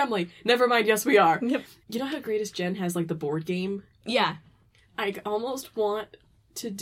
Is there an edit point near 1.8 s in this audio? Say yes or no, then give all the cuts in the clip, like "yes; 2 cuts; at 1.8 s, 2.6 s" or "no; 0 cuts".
yes; 1 cut; at 1.8 s